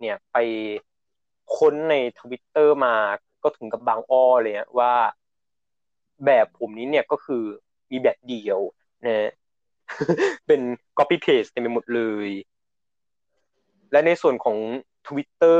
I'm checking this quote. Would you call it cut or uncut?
uncut